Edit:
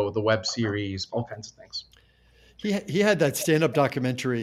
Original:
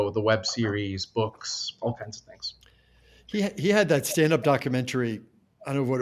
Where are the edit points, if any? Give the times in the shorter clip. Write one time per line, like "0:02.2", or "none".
0:01.1